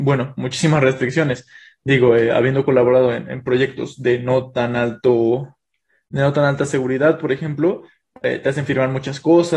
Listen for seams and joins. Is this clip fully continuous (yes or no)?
yes